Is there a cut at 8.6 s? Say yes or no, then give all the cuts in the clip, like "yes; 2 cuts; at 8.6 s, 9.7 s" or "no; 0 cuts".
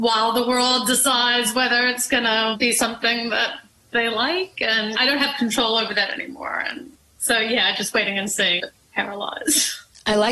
yes; 1 cut; at 8.6 s